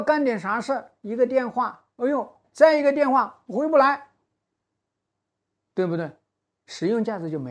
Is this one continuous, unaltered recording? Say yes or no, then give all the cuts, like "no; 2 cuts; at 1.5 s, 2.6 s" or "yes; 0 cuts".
no; 1 cut; at 2.4 s